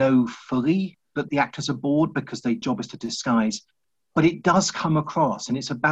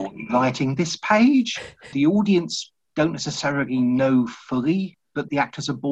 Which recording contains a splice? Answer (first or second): second